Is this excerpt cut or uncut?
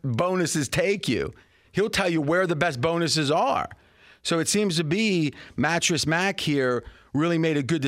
cut